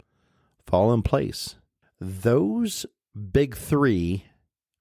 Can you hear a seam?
yes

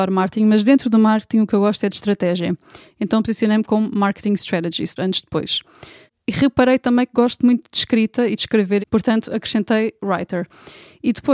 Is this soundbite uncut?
no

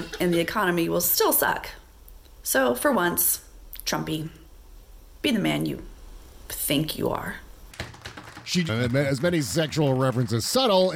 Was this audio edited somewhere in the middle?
yes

